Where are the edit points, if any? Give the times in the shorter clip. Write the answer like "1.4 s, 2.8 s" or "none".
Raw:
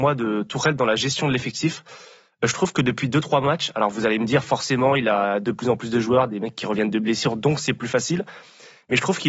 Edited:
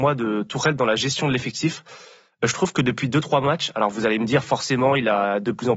none